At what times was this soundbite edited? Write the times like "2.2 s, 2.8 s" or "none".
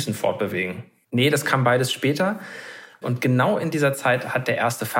1.0 s, 3.0 s